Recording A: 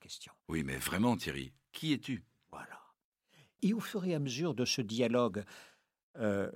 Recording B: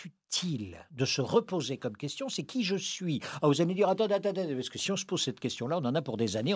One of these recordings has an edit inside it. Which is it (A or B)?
A